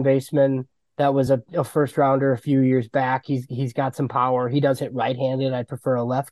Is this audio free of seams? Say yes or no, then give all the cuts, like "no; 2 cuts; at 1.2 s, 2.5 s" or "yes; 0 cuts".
yes; 0 cuts